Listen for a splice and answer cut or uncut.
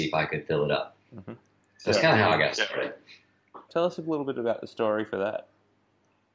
cut